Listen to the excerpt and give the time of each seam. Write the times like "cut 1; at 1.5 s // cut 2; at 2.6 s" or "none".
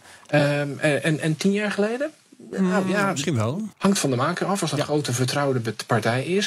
cut 1; at 3.7 s